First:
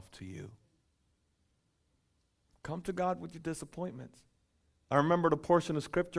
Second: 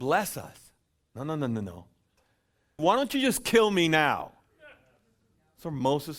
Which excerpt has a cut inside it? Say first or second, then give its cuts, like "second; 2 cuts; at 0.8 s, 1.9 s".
second; 1 cut; at 2.8 s